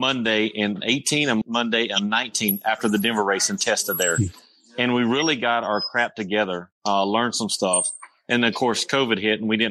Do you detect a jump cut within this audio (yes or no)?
yes